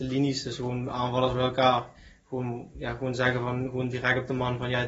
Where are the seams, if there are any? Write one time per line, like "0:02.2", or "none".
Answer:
none